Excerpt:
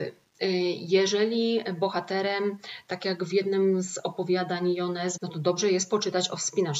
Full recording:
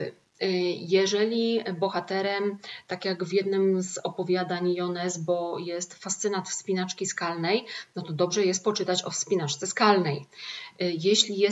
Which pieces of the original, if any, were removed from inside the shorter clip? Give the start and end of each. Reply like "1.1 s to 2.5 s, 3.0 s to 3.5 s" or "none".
5.2 s to 7.9 s